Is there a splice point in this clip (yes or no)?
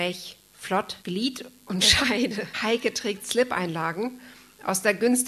yes